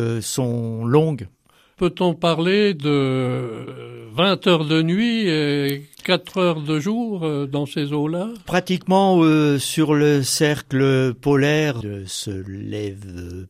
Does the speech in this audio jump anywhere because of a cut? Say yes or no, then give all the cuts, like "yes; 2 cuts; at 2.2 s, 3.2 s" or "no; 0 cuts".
yes; 1 cut; at 11.8 s